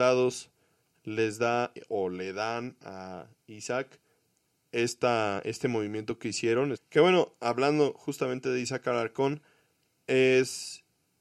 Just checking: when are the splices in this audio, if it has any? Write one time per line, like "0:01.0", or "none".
0:06.7